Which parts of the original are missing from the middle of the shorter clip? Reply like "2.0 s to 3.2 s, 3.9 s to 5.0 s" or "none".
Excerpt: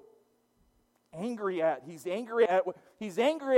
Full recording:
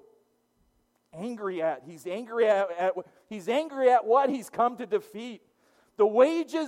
2.5 s to 2.8 s